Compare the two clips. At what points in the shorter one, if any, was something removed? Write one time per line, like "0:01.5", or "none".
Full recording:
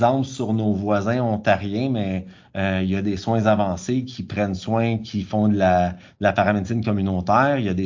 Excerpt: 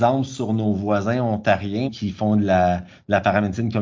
0:01.9